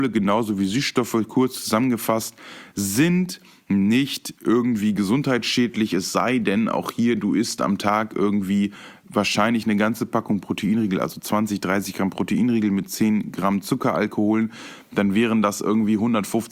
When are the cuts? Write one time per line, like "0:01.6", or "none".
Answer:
none